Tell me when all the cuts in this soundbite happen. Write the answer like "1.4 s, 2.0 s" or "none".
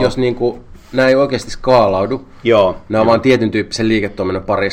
none